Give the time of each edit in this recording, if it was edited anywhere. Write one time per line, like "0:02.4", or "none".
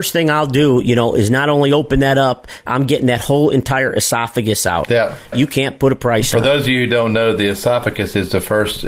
0:02.7
0:05.3